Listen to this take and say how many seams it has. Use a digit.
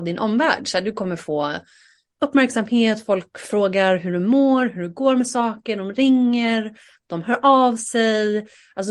0